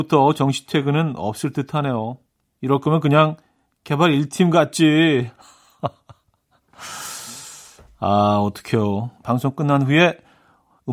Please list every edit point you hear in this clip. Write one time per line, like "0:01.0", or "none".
0:09.2